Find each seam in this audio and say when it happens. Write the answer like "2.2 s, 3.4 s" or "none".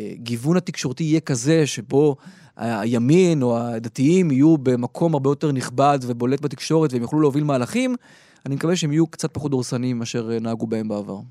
none